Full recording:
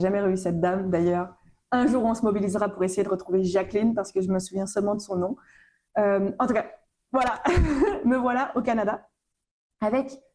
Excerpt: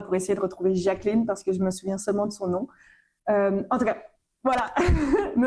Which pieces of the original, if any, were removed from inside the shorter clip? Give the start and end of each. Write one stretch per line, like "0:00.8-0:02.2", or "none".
none